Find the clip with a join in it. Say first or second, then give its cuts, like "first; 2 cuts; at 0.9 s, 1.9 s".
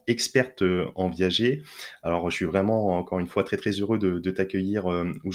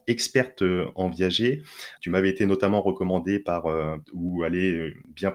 second; 2 cuts; at 2.0 s, 4.0 s